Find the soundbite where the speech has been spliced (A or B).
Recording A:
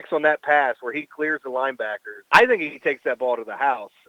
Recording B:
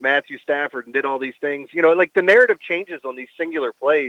A